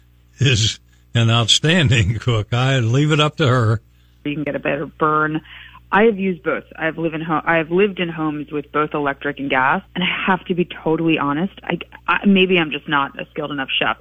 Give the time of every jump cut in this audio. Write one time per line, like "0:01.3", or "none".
0:04.3
0:09.9